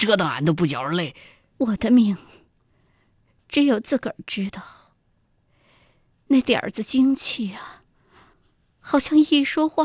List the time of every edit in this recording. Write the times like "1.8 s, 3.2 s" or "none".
1.5 s